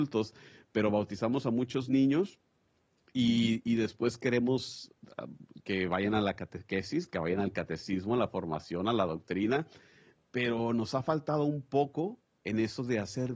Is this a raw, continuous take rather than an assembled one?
yes; 0 cuts

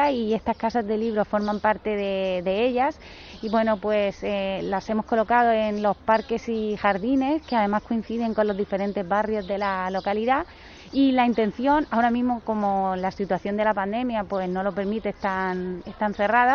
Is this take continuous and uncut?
yes; 0 cuts

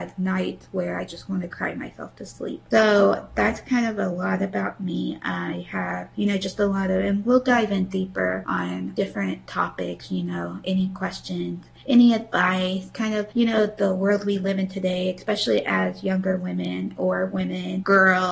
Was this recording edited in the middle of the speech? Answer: yes; 1 cut; at 2.7 s

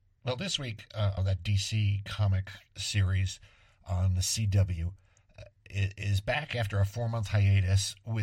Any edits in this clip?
yes; 1 cut; at 1.2 s

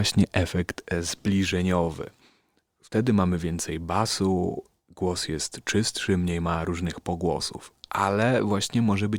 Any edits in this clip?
no; 0 cuts

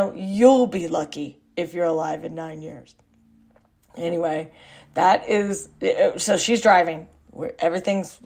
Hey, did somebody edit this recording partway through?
yes; 1 cut; at 7.2 s

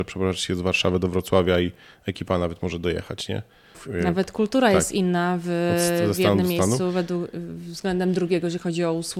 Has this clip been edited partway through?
yes; 1 cut; at 3.7 s

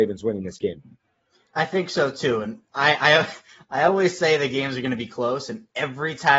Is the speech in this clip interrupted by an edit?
no; 0 cuts

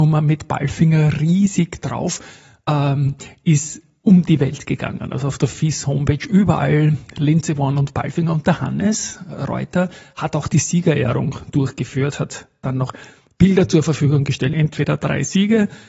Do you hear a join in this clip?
yes; 1 cut; at 14.5 s

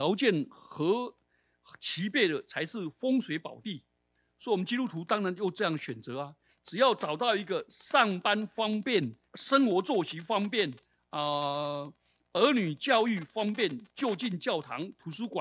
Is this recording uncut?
no; 2 cuts; at 6.5 s, 9.3 s

